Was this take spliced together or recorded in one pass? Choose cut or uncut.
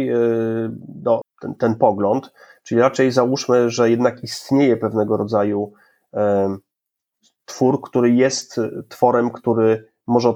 cut